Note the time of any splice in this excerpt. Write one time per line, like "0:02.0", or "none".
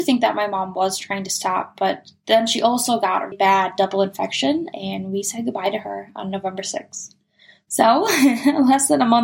0:03.3